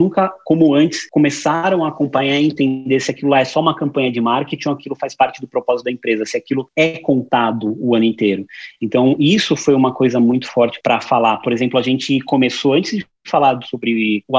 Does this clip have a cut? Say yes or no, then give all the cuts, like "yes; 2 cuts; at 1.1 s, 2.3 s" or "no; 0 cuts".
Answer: yes; 1 cut; at 10.8 s